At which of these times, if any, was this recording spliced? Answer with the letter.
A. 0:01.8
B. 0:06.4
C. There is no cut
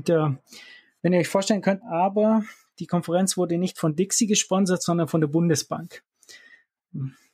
A